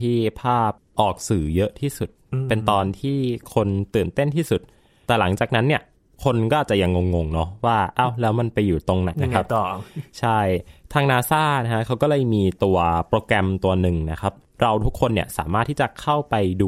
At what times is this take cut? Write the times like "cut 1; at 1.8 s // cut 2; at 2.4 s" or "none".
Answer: cut 1; at 9.1 s